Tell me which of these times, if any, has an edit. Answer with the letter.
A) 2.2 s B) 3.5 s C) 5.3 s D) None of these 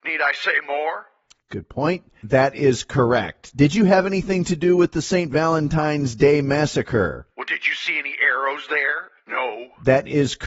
A